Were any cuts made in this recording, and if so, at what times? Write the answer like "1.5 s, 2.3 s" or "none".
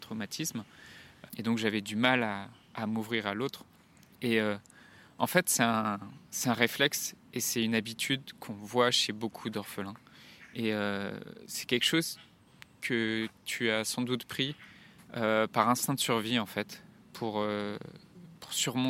1.3 s